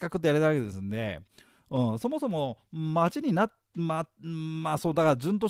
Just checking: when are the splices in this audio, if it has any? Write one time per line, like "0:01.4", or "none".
none